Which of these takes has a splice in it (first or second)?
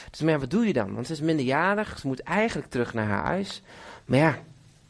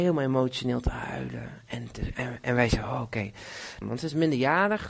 second